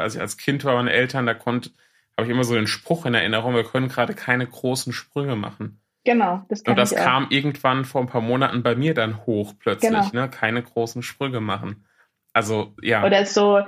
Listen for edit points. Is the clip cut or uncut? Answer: uncut